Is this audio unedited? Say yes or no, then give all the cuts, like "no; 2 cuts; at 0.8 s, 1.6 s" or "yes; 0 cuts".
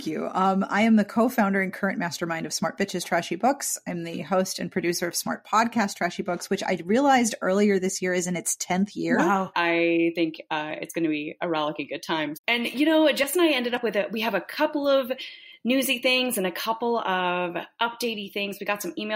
no; 2 cuts; at 9.5 s, 12.3 s